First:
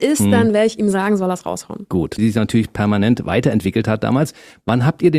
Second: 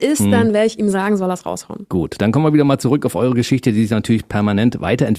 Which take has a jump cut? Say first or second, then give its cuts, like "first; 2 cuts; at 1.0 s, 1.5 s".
first; 1 cut; at 2.2 s